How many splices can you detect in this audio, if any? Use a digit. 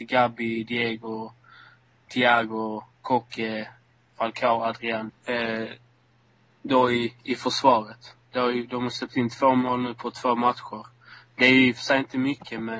1